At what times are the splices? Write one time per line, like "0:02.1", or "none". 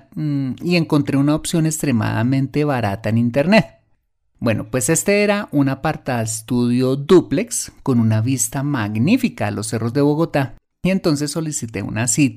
none